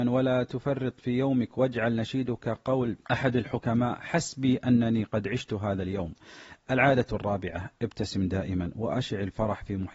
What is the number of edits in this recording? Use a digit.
1